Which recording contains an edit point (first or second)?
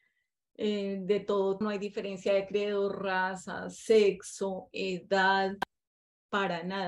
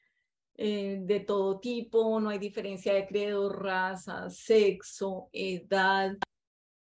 first